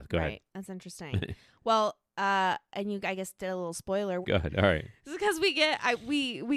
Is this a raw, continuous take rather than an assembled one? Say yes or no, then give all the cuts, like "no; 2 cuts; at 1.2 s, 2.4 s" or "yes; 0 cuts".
no; 1 cut; at 4.2 s